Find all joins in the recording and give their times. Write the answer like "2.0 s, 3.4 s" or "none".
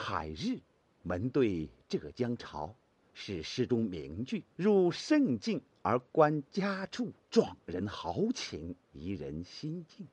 4.5 s, 7.2 s, 8.8 s